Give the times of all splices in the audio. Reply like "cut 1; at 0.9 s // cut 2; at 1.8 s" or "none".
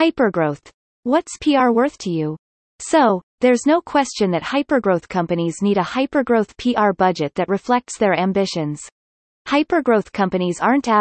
cut 1; at 2.7 s // cut 2; at 9.3 s